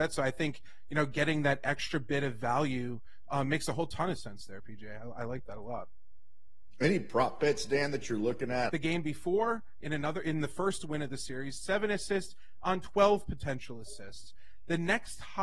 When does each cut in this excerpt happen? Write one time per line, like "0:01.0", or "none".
0:08.7